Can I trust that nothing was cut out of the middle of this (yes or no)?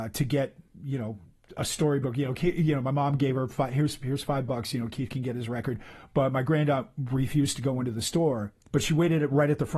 yes